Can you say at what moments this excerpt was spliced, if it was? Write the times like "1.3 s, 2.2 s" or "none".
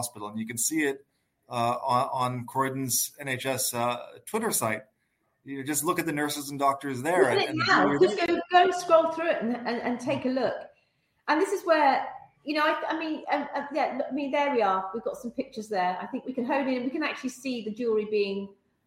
none